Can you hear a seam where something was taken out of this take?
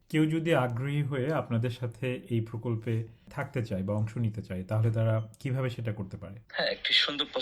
yes; 1 cut; at 6.5 s

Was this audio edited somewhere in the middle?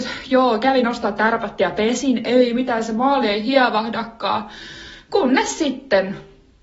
no; 0 cuts

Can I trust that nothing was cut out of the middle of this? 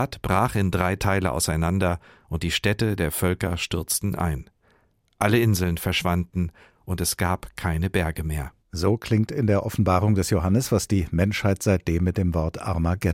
no; 1 cut; at 8.6 s

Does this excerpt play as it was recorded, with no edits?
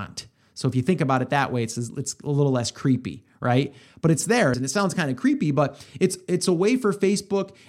no; 1 cut; at 4.5 s

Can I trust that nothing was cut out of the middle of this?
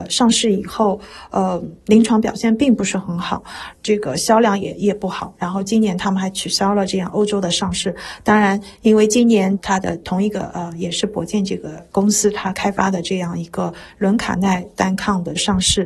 yes; 0 cuts

